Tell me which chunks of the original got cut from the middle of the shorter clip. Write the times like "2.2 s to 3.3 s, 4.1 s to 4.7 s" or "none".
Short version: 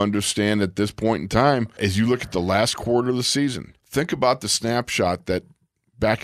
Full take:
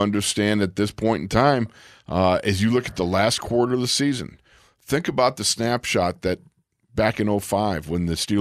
1.8 s to 2.4 s, 4.4 s to 4.7 s